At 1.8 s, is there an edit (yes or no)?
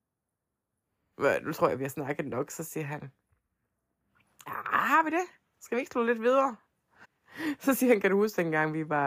no